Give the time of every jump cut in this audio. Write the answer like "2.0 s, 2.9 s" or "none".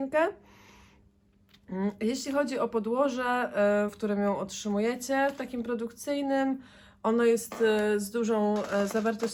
3.9 s